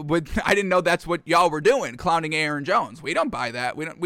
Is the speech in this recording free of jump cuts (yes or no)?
yes